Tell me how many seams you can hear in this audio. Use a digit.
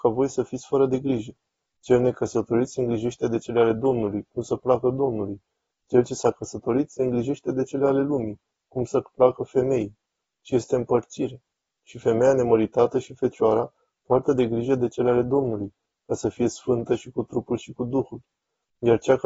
0